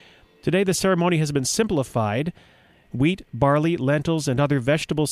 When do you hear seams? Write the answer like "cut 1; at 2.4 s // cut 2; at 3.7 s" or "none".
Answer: cut 1; at 2.9 s